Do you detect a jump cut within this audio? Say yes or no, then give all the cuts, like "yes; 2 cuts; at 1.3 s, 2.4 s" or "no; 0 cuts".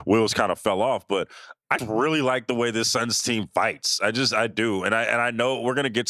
yes; 1 cut; at 1.8 s